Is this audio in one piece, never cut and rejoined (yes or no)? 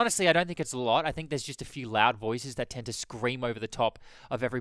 yes